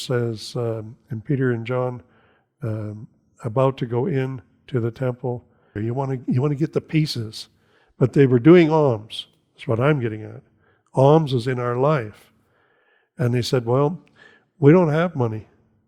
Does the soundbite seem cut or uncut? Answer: cut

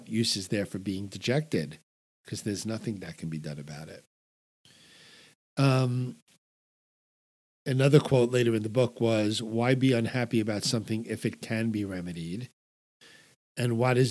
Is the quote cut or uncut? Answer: uncut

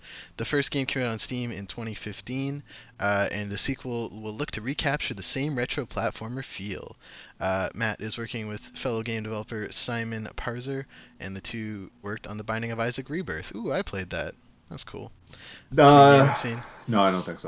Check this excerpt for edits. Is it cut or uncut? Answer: cut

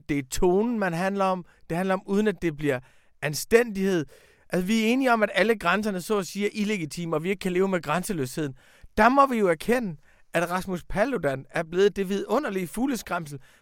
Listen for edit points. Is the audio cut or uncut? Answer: uncut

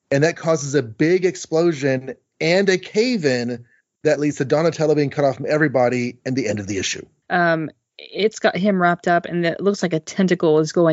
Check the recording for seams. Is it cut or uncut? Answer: cut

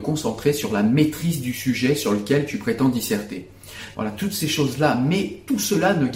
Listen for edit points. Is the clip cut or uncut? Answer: cut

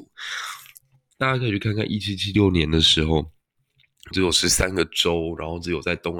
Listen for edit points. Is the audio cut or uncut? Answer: cut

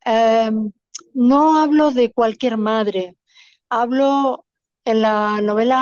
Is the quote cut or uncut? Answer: uncut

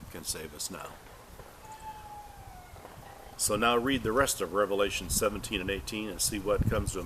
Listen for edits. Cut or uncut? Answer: cut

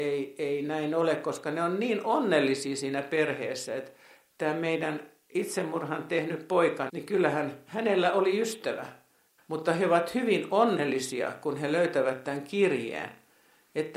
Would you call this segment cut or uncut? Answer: cut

